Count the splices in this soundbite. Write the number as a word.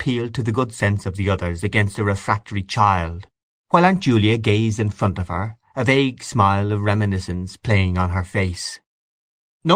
zero